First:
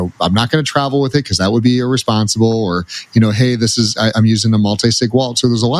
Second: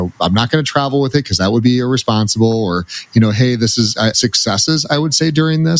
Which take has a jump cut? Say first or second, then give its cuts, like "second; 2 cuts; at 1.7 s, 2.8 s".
second; 1 cut; at 4.1 s